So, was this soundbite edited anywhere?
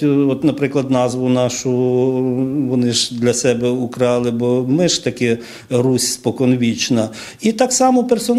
no; 0 cuts

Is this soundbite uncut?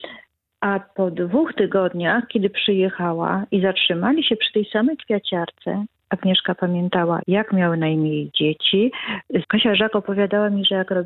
no; 2 cuts; at 7.2 s, 9.4 s

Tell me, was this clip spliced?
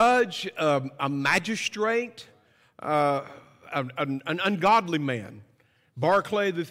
no; 0 cuts

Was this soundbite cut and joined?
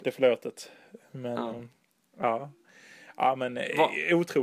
no; 0 cuts

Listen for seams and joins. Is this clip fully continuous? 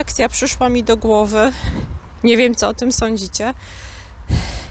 yes; 0 cuts

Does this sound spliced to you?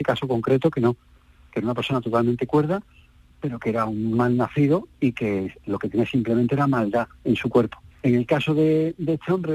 yes; 1 cut; at 7.9 s

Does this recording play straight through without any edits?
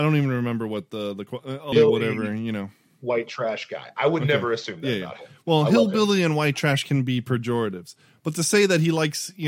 no; 1 cut; at 1.7 s

